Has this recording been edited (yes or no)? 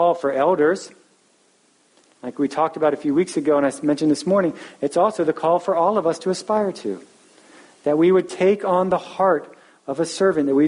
no